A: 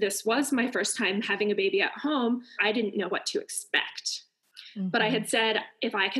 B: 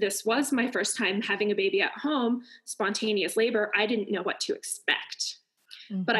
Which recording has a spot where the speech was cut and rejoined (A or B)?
A